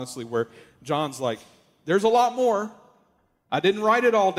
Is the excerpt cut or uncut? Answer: uncut